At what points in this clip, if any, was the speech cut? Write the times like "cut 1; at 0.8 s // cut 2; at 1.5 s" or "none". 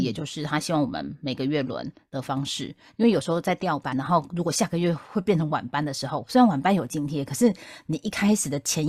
cut 1; at 3.9 s

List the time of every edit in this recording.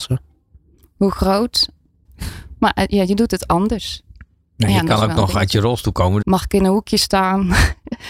cut 1; at 2.0 s // cut 2; at 6.2 s

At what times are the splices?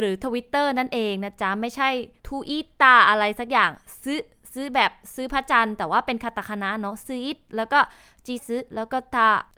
cut 1; at 8.4 s

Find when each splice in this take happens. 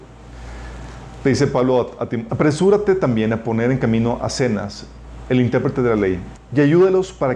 cut 1; at 2.3 s // cut 2; at 6.4 s

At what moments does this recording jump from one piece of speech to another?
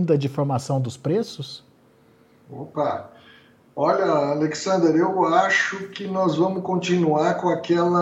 none

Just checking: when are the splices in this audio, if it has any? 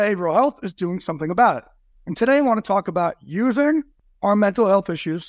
cut 1; at 1.9 s

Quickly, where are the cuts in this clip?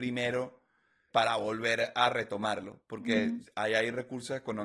cut 1; at 3.5 s

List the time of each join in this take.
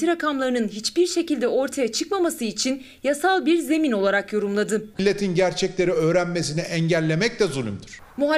cut 1; at 4.9 s

